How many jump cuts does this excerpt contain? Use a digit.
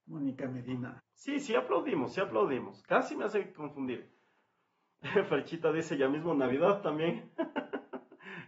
1